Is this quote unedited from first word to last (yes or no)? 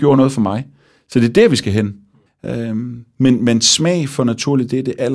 no